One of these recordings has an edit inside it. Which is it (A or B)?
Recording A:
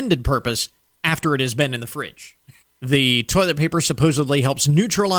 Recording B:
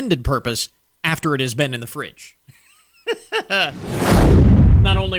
A